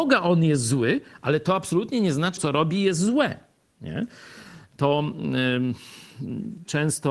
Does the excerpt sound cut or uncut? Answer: cut